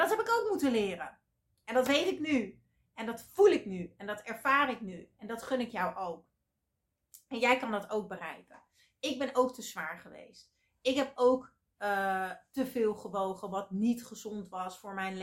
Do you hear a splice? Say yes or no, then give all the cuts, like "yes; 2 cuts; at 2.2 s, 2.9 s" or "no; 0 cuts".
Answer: no; 0 cuts